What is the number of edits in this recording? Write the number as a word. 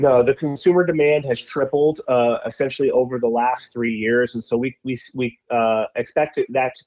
zero